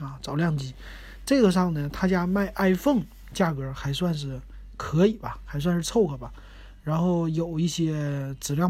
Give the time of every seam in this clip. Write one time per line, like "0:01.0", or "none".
none

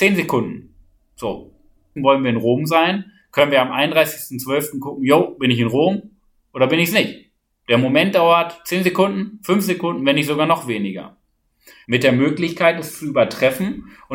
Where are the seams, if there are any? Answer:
0:02.0
0:11.8

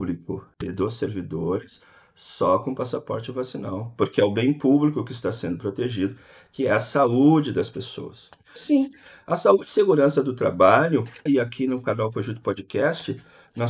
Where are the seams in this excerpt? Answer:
0:08.6
0:11.3

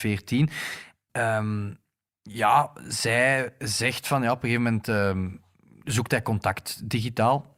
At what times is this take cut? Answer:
0:01.1

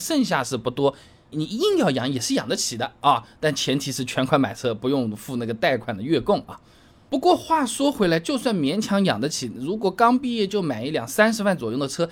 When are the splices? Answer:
0:01.3

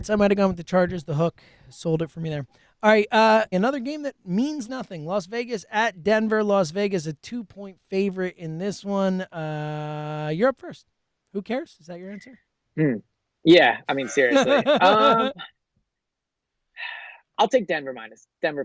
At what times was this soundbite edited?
0:03.5
0:04.7

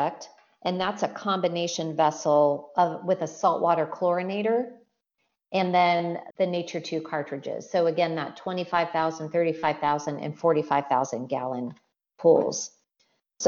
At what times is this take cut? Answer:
0:06.3

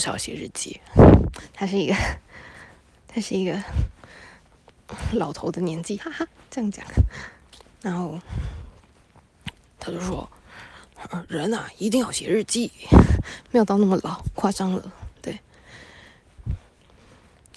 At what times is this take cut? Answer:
0:06.0
0:13.5

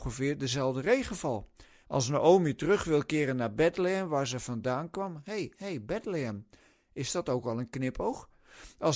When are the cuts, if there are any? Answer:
0:01.8

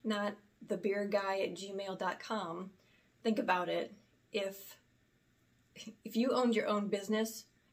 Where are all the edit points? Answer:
none

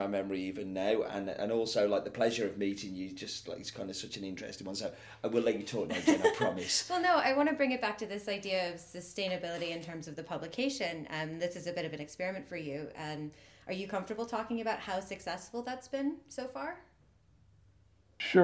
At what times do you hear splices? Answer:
none

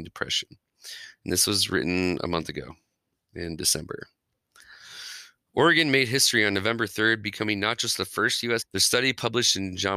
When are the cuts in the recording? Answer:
0:05.5
0:08.6

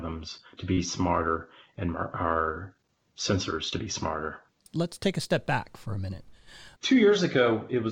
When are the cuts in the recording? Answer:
0:06.8

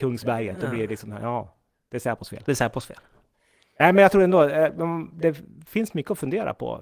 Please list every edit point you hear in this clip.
none

